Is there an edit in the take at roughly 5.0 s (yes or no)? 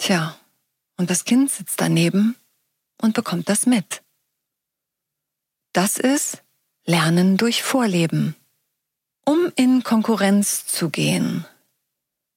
no